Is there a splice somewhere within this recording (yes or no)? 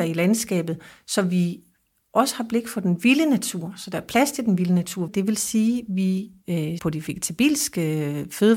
yes